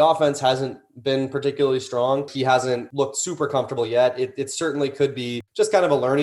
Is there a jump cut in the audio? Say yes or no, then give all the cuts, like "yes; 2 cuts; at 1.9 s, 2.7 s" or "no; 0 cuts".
no; 0 cuts